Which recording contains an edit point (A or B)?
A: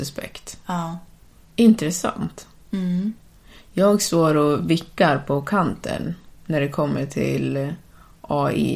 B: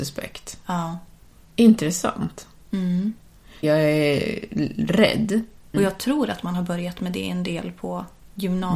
B